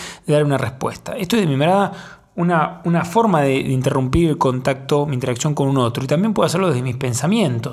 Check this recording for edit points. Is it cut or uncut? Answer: uncut